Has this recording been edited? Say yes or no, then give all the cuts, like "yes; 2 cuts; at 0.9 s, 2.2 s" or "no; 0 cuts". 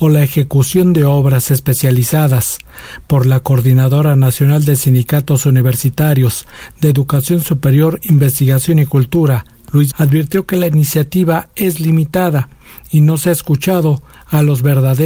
yes; 1 cut; at 9.9 s